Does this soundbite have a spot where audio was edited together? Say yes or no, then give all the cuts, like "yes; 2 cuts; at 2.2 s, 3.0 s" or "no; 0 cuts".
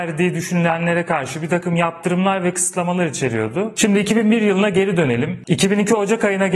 yes; 2 cuts; at 3.8 s, 5.4 s